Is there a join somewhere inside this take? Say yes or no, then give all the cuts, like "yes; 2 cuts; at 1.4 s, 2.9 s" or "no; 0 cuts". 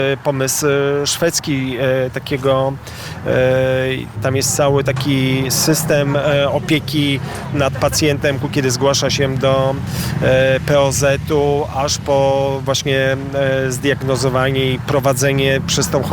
yes; 2 cuts; at 4.2 s, 8.4 s